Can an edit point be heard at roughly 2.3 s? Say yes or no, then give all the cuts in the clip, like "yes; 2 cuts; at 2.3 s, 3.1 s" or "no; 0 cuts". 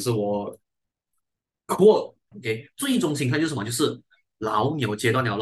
yes; 1 cut; at 2.3 s